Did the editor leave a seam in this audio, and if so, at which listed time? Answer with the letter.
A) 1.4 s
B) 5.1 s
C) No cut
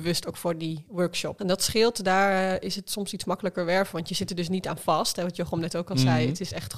A